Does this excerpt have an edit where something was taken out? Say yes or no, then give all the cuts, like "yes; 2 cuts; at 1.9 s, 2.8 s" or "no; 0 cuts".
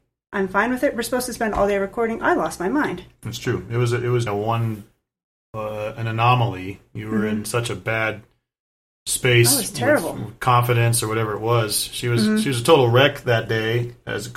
yes; 1 cut; at 4.3 s